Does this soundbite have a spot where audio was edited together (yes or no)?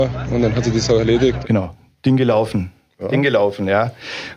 no